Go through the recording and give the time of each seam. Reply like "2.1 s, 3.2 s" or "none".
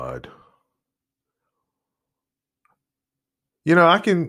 none